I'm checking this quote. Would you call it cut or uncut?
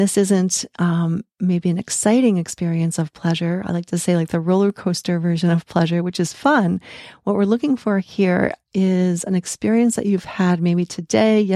uncut